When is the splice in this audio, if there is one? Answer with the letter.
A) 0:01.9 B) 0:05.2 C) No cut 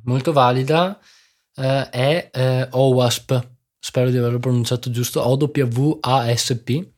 C